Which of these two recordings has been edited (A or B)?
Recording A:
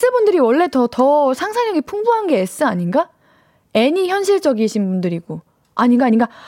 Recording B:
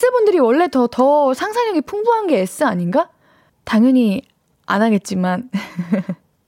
B